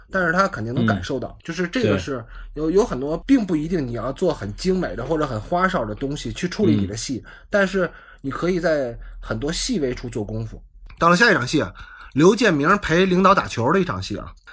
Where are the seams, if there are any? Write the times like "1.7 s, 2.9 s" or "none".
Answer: none